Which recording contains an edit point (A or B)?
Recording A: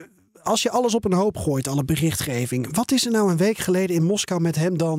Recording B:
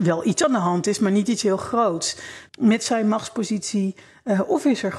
B